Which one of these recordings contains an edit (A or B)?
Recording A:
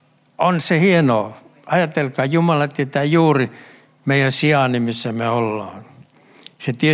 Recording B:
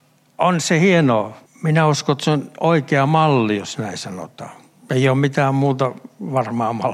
B